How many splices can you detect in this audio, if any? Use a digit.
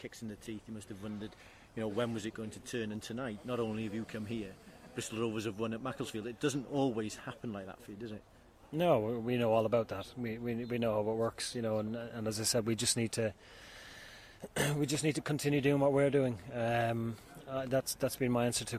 0